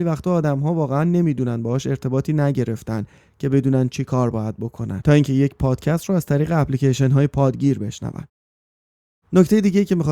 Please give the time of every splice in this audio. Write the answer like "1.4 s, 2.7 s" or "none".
none